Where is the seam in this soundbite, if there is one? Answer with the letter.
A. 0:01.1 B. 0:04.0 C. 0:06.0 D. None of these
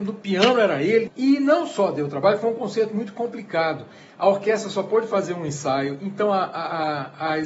A